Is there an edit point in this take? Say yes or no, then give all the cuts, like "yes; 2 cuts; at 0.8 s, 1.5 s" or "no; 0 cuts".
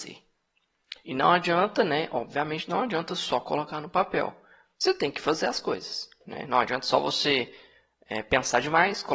no; 0 cuts